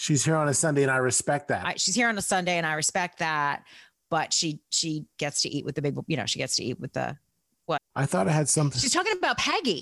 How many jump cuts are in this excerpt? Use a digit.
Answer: 1